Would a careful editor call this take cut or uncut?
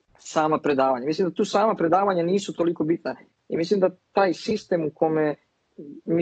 cut